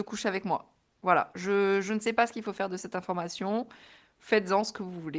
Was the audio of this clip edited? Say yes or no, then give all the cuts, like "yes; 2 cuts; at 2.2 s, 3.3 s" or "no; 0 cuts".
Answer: no; 0 cuts